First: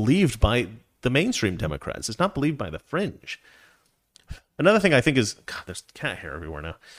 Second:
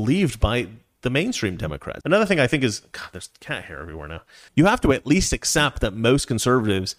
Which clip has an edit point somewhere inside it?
second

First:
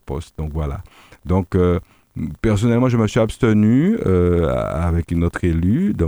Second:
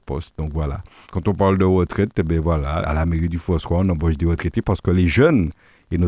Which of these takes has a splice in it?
second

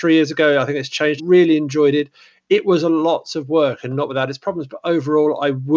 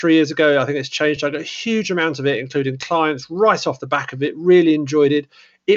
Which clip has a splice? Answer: first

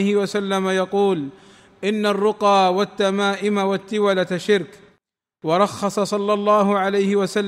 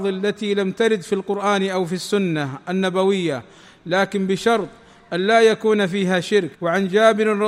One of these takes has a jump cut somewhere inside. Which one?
second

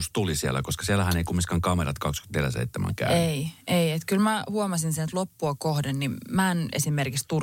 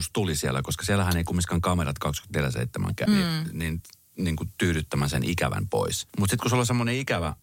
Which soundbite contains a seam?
second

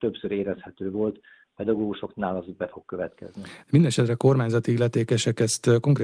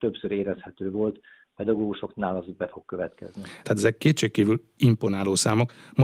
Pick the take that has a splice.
second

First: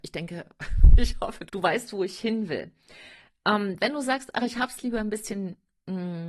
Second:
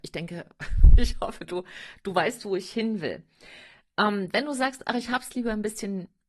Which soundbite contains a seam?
first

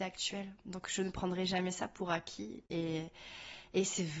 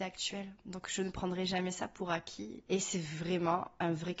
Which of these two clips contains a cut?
second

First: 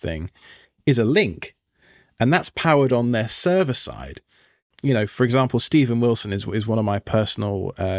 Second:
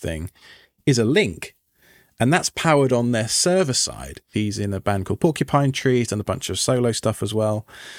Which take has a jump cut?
second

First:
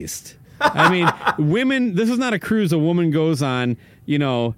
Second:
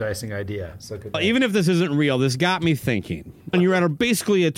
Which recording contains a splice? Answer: second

